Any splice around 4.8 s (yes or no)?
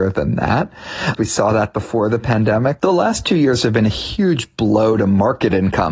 no